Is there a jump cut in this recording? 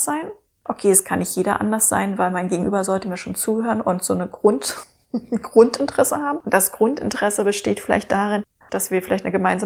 no; 0 cuts

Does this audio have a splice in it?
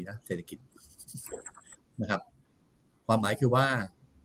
no; 0 cuts

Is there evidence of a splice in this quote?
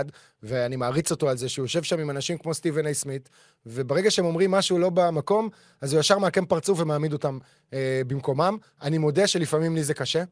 no; 0 cuts

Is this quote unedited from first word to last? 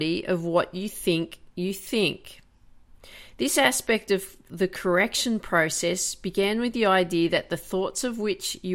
yes; 0 cuts

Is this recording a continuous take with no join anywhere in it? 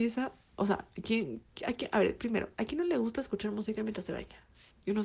yes; 0 cuts

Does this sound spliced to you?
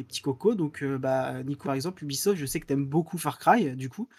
yes; 1 cut; at 1.6 s

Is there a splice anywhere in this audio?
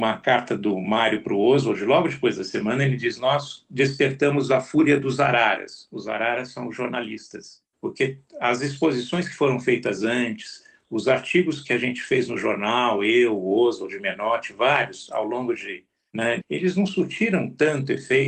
yes; 2 cuts; at 7.7 s, 16.4 s

